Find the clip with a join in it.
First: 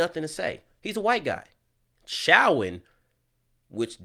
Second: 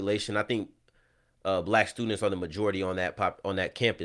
first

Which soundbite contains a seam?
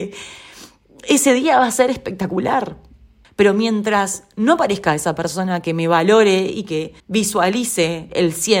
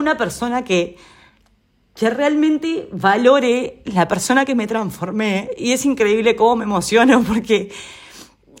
first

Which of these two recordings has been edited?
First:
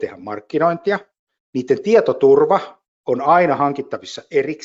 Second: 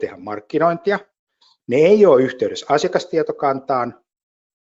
first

